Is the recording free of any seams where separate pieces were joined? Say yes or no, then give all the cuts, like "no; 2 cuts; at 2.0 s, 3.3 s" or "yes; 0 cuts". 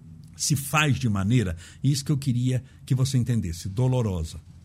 yes; 0 cuts